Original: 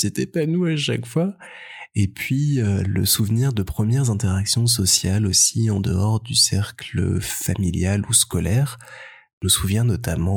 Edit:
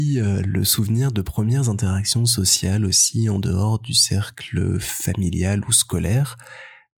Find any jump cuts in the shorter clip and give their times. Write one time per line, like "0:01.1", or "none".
none